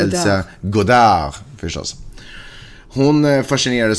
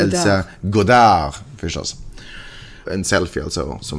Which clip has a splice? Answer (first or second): second